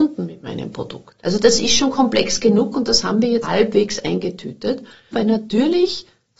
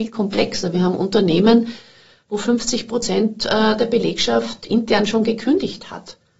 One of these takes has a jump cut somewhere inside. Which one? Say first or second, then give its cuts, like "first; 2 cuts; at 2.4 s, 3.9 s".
first; 3 cuts; at 1.2 s, 3.4 s, 5.1 s